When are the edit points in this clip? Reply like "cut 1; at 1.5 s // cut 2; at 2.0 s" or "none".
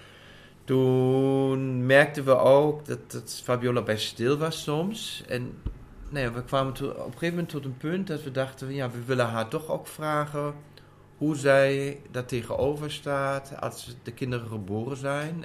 none

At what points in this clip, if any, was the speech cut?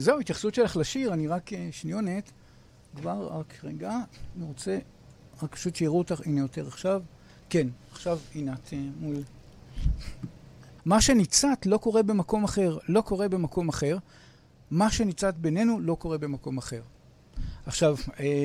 cut 1; at 10.8 s

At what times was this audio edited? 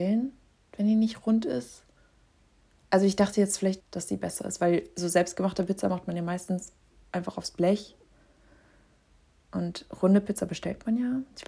cut 1; at 3.8 s

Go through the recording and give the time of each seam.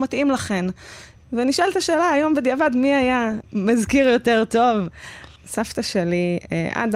cut 1; at 1.2 s // cut 2; at 5.4 s

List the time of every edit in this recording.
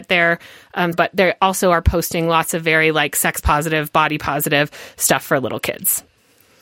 cut 1; at 0.9 s

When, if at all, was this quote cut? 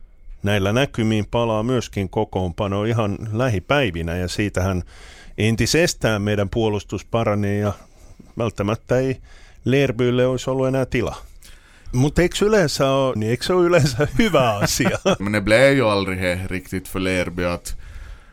cut 1; at 11.9 s // cut 2; at 13.2 s // cut 3; at 15.2 s

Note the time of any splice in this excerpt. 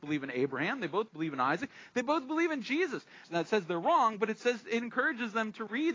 cut 1; at 3.2 s

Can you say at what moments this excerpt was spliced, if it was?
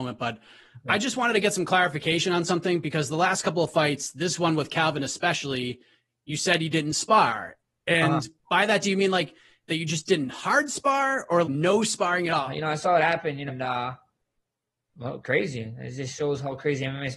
cut 1; at 11.4 s // cut 2; at 12.5 s // cut 3; at 13.5 s

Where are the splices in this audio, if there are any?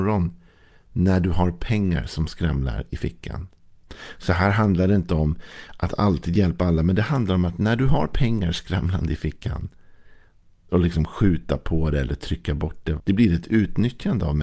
cut 1; at 10.7 s // cut 2; at 13.0 s

